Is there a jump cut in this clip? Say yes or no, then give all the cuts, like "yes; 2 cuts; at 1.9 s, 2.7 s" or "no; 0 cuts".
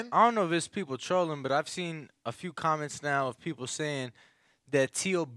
no; 0 cuts